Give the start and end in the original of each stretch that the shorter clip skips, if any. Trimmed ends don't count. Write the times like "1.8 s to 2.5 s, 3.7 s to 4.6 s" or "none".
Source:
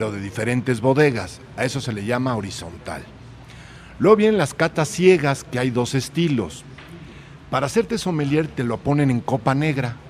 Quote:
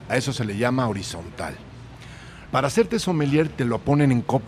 3.9 s to 7.5 s